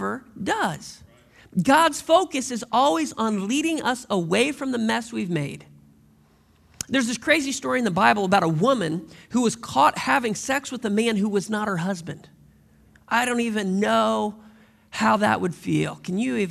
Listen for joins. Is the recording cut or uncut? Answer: uncut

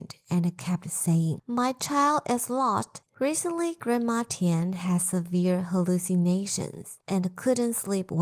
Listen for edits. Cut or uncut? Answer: cut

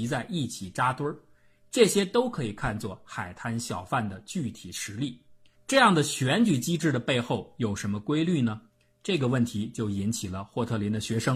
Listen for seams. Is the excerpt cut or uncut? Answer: cut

